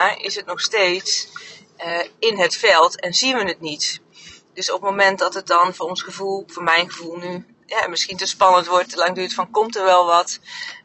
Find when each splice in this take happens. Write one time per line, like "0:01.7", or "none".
none